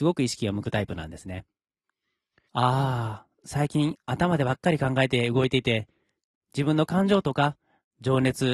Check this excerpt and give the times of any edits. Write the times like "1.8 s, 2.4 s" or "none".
2.5 s